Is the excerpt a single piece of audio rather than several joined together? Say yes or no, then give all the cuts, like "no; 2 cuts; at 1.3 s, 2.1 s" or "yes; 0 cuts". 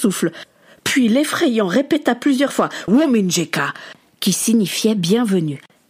no; 1 cut; at 2.9 s